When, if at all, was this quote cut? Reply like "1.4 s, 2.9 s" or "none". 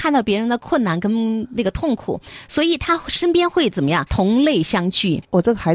none

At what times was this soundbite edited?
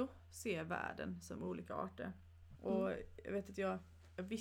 2.6 s

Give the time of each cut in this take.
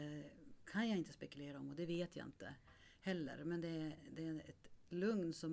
none

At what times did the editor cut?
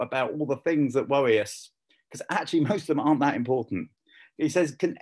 none

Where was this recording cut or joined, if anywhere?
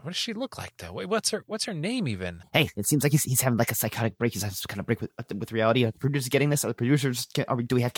none

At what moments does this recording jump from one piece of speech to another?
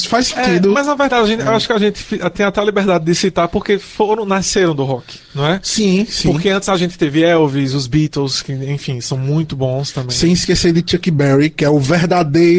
none

